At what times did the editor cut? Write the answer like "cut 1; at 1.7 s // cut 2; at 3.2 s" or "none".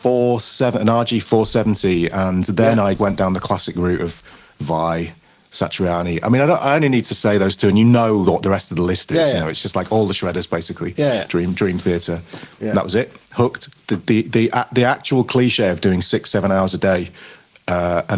cut 1; at 3.0 s